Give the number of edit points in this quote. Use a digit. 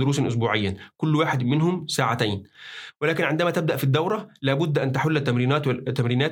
0